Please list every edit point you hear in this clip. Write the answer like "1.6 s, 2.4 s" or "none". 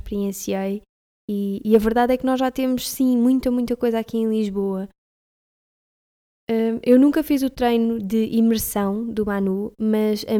none